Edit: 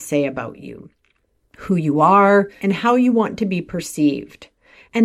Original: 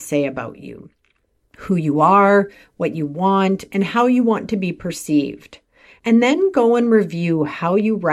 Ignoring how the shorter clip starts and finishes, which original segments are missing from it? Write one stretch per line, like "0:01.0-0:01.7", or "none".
0:02.6-0:03.7